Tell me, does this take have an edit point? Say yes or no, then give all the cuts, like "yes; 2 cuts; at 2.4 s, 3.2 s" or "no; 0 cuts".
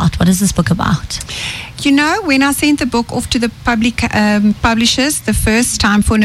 yes; 1 cut; at 1.7 s